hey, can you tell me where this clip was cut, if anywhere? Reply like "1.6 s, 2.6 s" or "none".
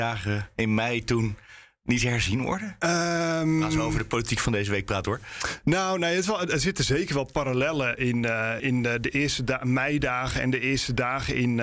8.6 s